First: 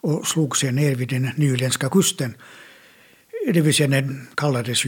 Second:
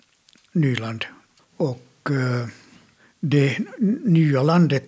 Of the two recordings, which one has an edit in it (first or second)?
second